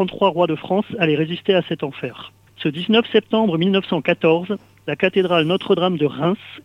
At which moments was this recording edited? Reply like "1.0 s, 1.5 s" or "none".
2.5 s